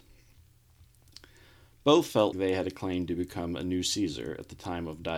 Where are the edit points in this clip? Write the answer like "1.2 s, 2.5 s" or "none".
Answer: 2.3 s